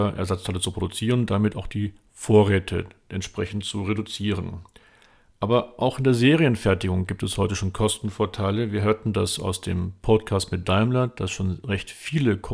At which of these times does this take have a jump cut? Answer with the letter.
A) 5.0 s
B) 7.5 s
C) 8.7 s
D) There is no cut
D